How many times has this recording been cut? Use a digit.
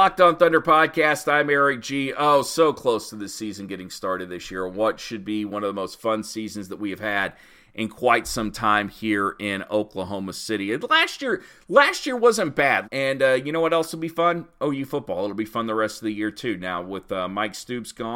1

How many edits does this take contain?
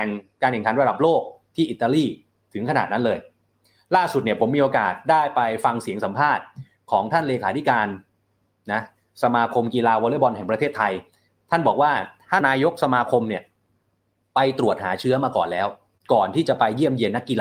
1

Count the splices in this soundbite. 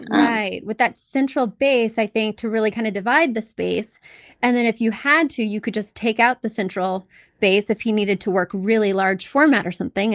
0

